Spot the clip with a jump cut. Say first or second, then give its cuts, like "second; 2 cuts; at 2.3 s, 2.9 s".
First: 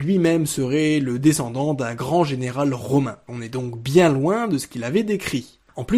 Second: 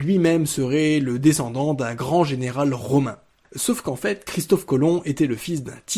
first; 1 cut; at 3.3 s